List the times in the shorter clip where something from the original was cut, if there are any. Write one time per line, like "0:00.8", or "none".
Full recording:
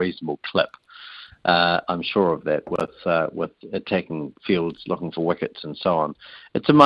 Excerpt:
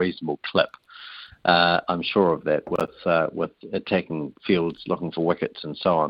none